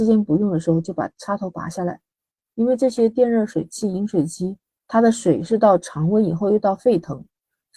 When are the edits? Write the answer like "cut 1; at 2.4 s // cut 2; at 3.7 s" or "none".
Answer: none

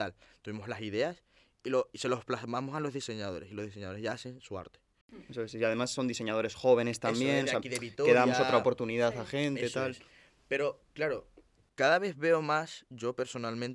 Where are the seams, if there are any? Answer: none

